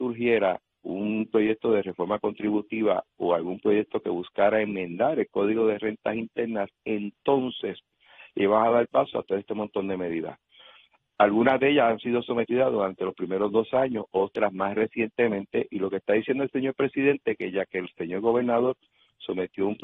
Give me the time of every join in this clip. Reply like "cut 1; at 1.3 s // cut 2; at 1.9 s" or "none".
none

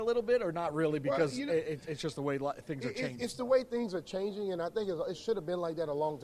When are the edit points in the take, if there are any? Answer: none

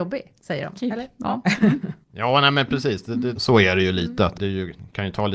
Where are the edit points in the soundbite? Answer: cut 1; at 3.3 s // cut 2; at 4.3 s

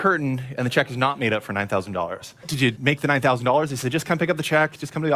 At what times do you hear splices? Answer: cut 1; at 2.4 s

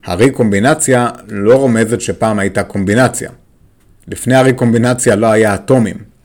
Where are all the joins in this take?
none

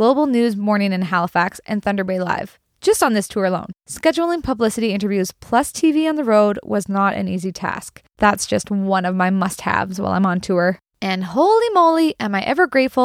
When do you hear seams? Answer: cut 1; at 8.2 s // cut 2; at 10.8 s

